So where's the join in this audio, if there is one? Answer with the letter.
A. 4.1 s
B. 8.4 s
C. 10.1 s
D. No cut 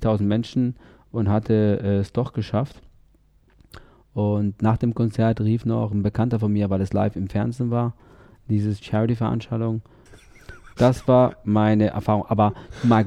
C